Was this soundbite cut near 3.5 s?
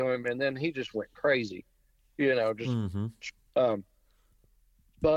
yes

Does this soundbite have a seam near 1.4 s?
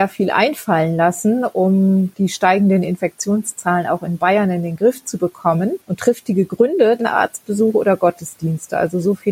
no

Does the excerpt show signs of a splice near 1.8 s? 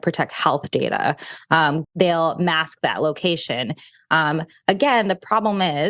yes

